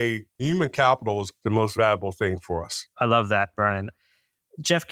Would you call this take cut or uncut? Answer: cut